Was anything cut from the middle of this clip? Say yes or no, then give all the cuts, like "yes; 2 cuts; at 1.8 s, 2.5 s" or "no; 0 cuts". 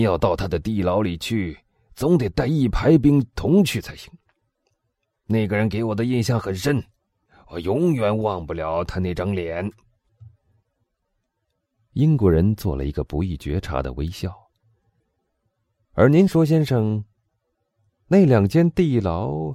no; 0 cuts